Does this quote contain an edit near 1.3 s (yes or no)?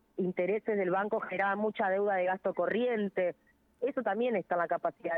no